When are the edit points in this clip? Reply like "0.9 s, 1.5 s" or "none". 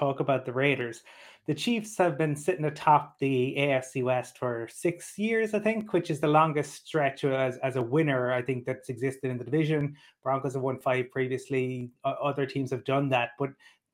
none